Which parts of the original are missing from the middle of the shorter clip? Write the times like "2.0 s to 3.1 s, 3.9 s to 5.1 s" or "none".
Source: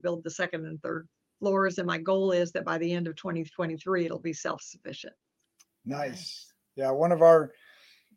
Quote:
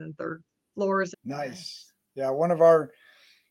1.8 s to 5.7 s